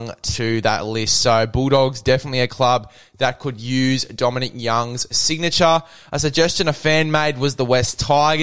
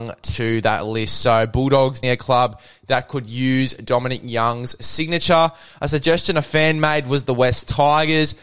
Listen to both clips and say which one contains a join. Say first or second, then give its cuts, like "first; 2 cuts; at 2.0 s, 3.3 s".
second; 1 cut; at 2.0 s